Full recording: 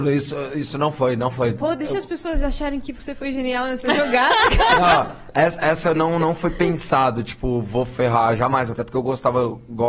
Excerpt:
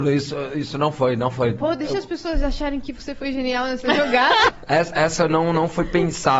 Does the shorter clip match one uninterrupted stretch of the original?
no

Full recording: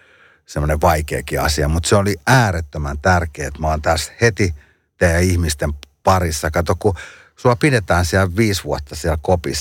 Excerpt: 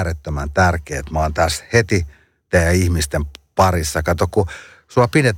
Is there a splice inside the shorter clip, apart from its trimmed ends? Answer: no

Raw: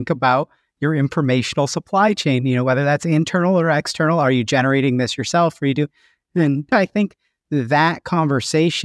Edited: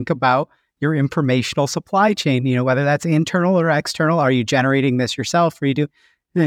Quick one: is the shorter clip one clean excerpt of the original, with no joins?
yes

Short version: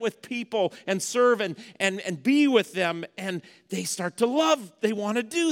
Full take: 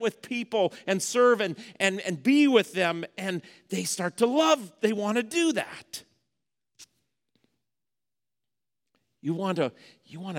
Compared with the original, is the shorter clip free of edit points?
yes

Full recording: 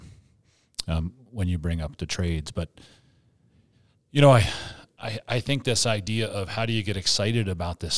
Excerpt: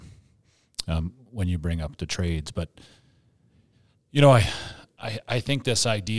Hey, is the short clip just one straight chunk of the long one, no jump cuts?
yes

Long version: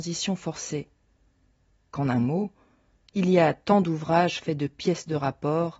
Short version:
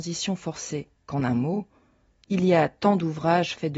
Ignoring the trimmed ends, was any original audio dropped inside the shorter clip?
yes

